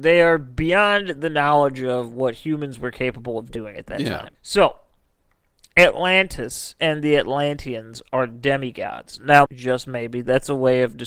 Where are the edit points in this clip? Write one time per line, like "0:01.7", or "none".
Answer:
0:04.3
0:09.5